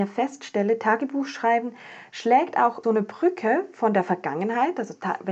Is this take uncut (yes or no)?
no